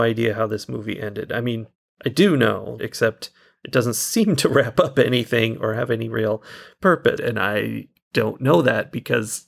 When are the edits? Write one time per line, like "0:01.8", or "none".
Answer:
0:02.8
0:07.2

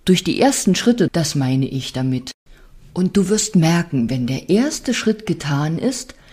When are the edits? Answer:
0:01.1

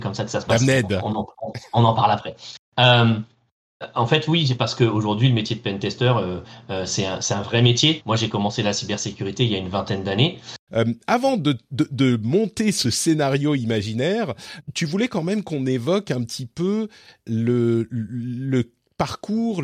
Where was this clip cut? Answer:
0:08.0
0:10.7
0:14.6

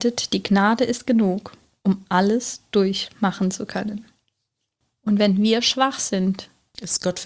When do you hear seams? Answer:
none

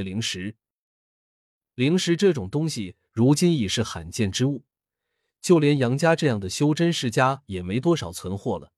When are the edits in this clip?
none

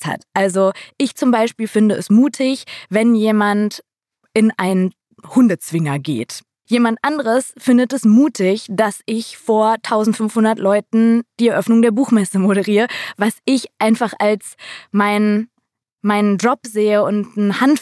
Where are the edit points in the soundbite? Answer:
0:06.7

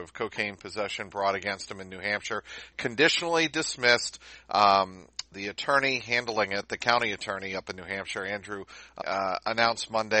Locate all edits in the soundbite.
0:05.3
0:09.0

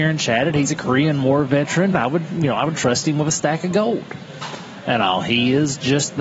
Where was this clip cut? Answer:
0:01.9

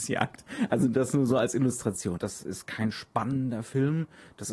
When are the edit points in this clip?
0:02.2

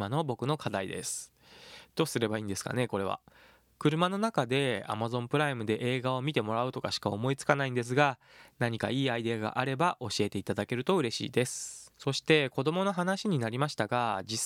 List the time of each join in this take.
0:11.9

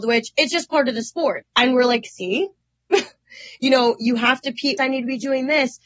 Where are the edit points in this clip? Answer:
0:01.4
0:04.8

